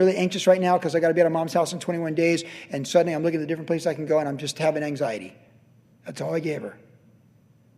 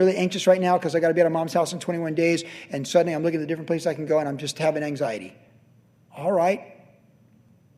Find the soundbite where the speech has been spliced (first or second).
first